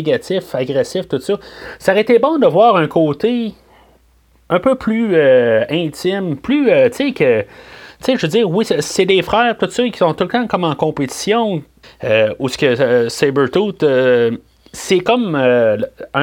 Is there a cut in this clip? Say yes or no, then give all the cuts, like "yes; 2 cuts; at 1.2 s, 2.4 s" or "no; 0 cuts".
yes; 1 cut; at 11.8 s